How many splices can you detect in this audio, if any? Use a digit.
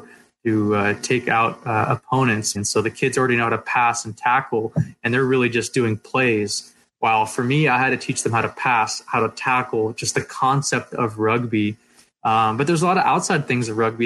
1